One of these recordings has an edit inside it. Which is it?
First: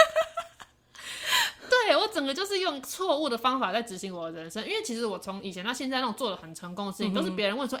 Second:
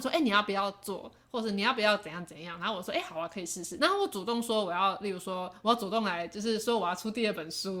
second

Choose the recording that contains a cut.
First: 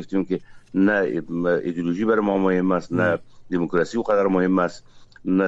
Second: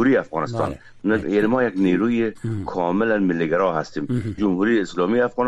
second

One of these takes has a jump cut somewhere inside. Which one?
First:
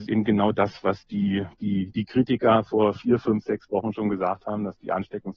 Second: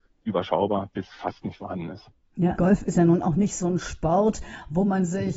second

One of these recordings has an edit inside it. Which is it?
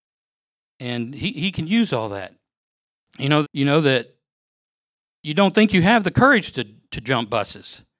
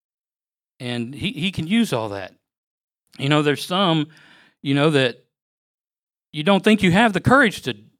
first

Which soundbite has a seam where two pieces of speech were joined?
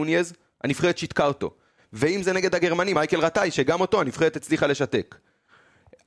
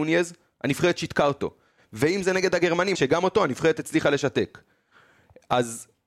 second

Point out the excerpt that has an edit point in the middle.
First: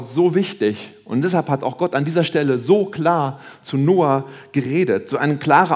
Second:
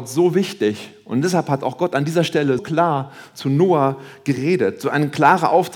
second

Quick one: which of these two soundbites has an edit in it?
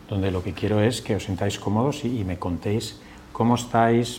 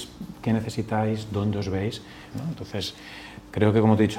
second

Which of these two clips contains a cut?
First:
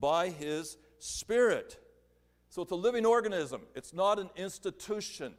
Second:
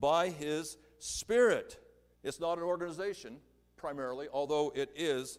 second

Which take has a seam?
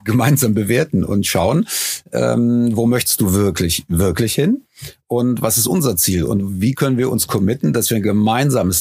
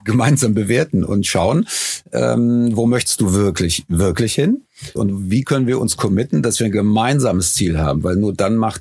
second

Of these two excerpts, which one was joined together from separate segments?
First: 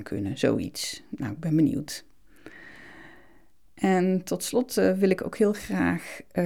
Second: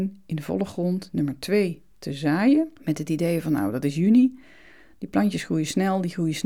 second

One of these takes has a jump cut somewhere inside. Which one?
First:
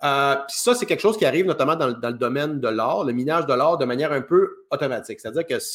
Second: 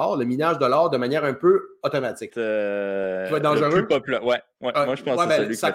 second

